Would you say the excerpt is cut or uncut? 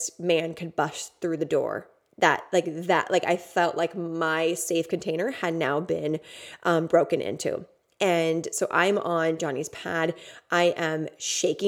uncut